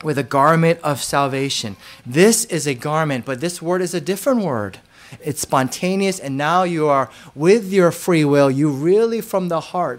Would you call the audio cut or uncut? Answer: cut